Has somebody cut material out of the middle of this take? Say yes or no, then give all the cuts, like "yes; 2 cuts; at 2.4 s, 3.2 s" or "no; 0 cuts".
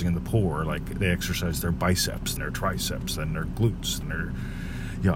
yes; 2 cuts; at 2.4 s, 4.0 s